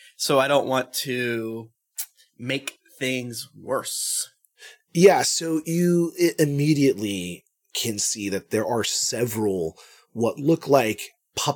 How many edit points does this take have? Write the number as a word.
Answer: zero